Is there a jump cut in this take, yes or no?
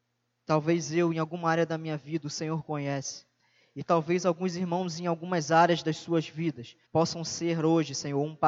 yes